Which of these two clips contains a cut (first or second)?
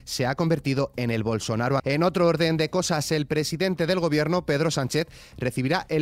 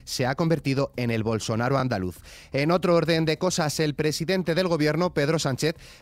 first